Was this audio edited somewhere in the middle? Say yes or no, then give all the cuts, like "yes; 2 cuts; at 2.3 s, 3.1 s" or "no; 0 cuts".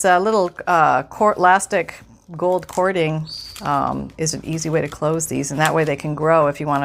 yes; 1 cut; at 4.3 s